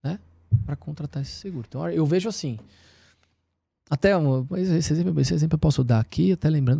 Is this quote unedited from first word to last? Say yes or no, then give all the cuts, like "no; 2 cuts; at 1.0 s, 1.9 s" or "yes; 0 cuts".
yes; 0 cuts